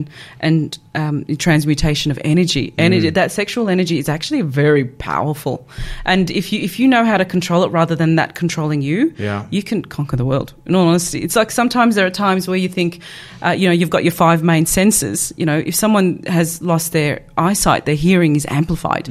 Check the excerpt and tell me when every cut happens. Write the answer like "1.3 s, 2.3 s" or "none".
none

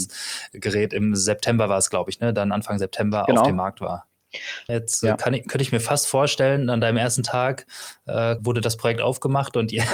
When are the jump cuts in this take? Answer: 4.7 s, 8.4 s

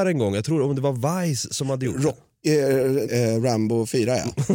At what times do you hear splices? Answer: 3.1 s

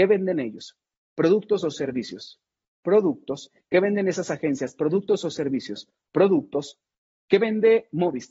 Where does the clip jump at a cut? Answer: none

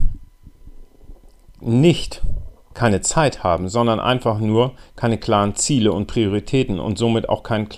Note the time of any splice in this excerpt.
none

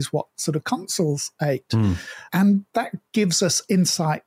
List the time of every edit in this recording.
2.3 s

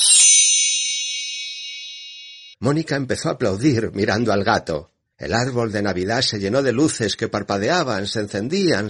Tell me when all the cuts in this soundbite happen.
none

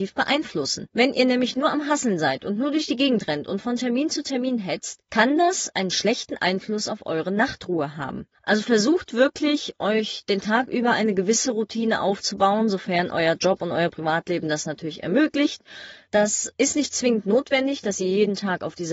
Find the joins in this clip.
16.1 s

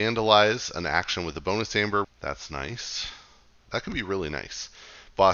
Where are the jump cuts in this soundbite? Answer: 2.0 s

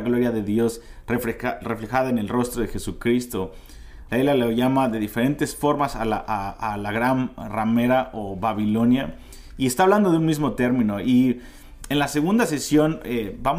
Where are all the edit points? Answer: 4.1 s

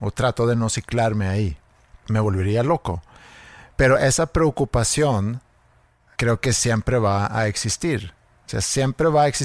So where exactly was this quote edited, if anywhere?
none

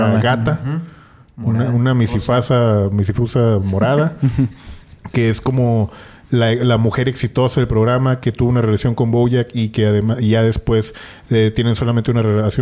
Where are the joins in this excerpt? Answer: none

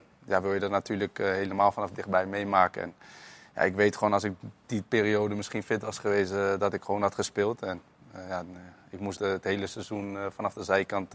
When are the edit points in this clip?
9.1 s

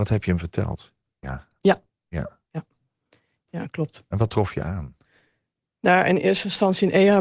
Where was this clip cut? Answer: 1.2 s

